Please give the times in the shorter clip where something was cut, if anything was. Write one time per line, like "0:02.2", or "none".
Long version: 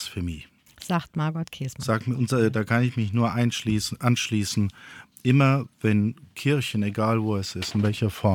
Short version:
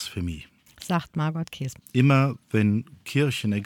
0:01.8